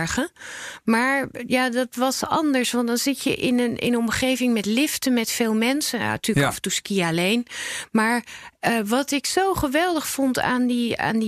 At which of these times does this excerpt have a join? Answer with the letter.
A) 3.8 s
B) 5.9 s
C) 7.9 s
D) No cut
D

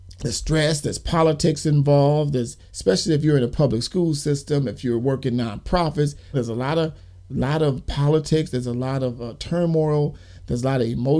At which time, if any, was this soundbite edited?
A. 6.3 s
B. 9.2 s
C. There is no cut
A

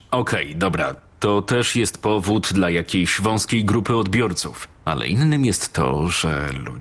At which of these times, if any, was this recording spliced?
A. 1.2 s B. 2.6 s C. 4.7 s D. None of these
C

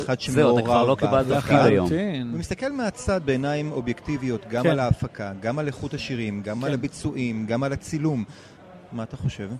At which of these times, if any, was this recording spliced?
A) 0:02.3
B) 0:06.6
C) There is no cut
C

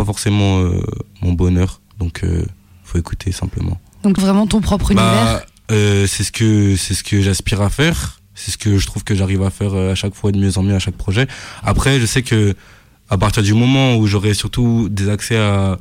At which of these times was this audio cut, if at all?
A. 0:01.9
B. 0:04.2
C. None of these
B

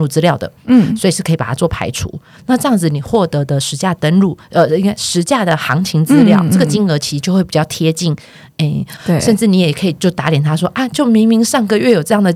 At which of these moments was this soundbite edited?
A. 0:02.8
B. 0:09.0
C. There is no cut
B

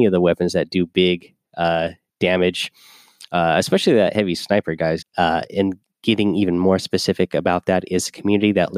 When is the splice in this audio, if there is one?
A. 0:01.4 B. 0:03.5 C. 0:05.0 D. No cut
C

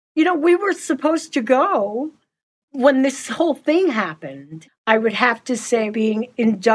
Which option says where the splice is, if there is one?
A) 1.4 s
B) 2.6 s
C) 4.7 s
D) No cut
C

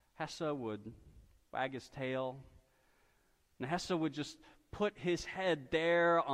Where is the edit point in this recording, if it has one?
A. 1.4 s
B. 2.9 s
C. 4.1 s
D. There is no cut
D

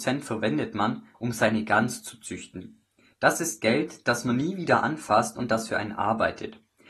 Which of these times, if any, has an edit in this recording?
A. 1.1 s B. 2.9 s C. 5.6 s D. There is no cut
A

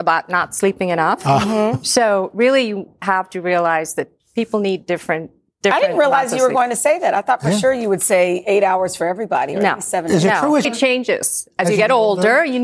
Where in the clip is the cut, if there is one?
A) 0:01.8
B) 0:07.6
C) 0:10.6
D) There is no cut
C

